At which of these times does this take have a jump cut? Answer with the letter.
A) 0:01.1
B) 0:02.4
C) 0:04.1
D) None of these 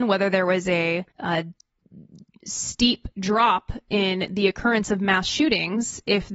A